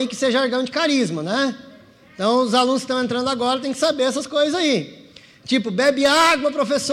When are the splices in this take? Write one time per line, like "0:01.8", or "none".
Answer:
none